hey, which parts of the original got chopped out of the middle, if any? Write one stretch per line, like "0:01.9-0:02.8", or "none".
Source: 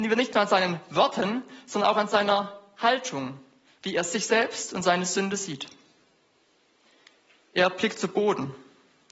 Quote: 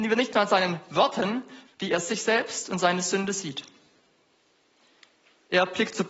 0:01.6-0:03.7